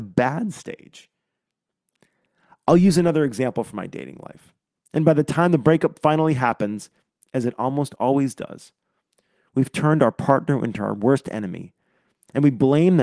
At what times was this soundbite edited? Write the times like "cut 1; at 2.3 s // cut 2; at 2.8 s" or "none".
cut 1; at 4.7 s